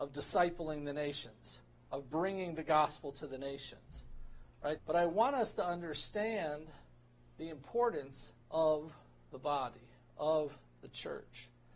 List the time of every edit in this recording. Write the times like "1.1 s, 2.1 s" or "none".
4.8 s, 8.4 s